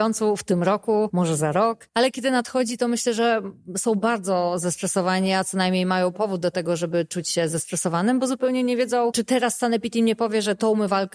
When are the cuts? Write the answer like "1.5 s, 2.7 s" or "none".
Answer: none